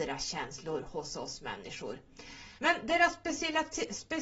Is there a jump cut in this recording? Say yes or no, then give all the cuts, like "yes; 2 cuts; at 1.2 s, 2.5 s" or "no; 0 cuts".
yes; 1 cut; at 2.6 s